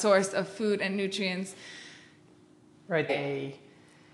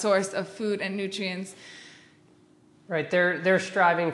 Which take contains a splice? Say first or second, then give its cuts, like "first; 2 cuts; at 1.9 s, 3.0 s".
first; 1 cut; at 3.1 s